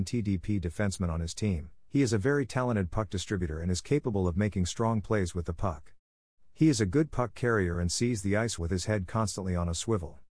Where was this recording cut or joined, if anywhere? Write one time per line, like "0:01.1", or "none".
0:08.6